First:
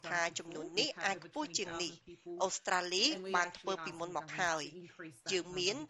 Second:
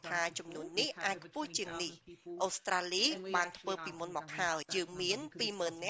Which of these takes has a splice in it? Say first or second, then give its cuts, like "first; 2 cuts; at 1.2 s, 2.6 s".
second; 1 cut; at 4.6 s